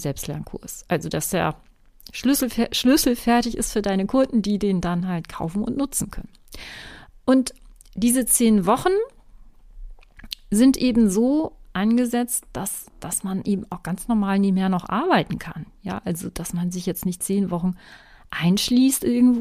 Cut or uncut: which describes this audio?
uncut